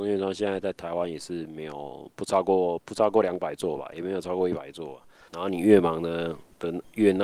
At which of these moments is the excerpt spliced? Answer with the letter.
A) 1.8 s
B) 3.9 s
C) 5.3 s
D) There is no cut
C